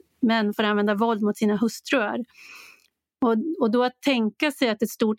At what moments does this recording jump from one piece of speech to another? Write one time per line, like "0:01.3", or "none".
none